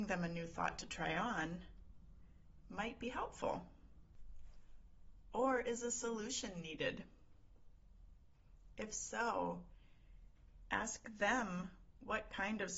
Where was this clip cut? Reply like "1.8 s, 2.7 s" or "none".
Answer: none